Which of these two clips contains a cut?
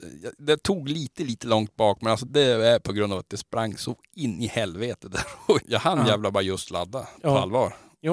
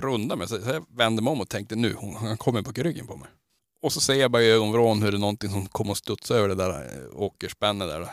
first; 2 cuts; at 2.3 s, 5.6 s

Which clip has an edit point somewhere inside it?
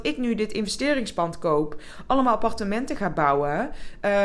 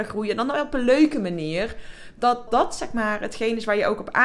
second; 1 cut; at 2.5 s

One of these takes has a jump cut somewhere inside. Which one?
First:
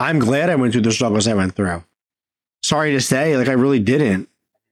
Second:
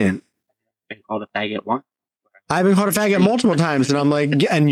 first; 1 cut; at 2.5 s

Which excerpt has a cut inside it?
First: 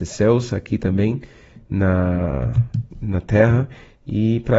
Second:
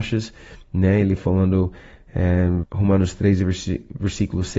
second; 1 cut; at 2.6 s

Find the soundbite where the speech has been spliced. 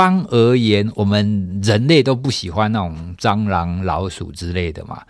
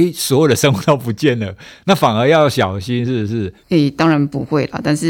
second; 1 cut; at 3.6 s

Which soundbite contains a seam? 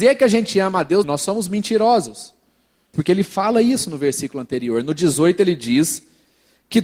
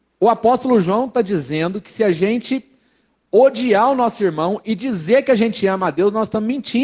first; 2 cuts; at 1.0 s, 2.9 s

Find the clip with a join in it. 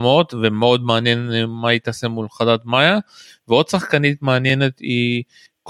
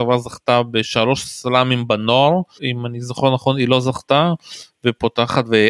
second; 1 cut; at 2.6 s

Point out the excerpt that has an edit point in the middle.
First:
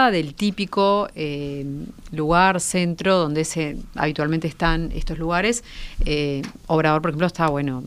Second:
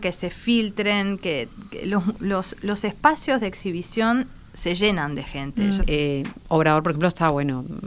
second; 1 cut; at 5.8 s

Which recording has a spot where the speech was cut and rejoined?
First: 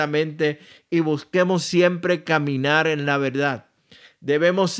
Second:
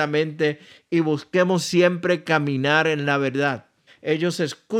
second; 1 cut; at 3.9 s

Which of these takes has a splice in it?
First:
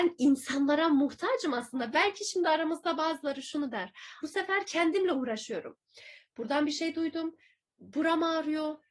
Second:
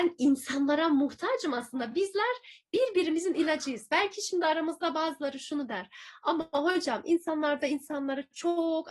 first; 2 cuts; at 1.9 s, 4.2 s

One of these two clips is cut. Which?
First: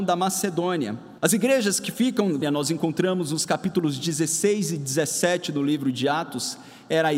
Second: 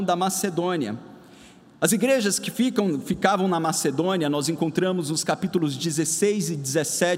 first; 2 cuts; at 1.2 s, 2.4 s

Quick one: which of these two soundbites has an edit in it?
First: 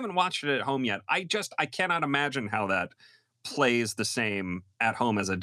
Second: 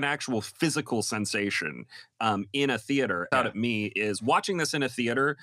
second; 1 cut; at 3.3 s

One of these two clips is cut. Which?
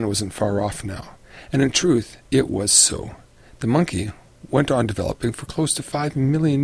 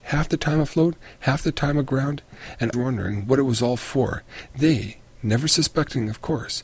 second; 1 cut; at 2.7 s

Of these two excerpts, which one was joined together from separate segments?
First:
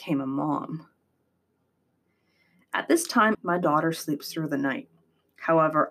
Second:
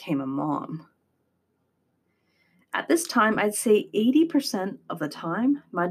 first; 1 cut; at 3.3 s

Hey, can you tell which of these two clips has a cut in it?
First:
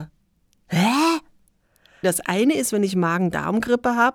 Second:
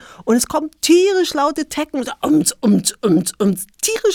first; 1 cut; at 2.0 s

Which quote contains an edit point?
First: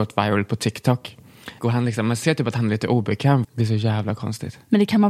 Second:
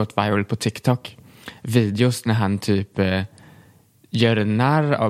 first; 2 cuts; at 1.6 s, 3.4 s

